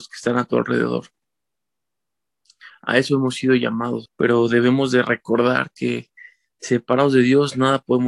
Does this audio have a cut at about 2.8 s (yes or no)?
no